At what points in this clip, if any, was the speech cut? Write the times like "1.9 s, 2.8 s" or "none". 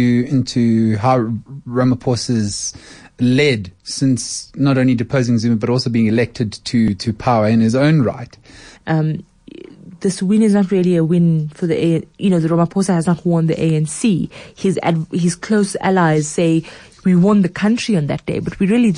8.8 s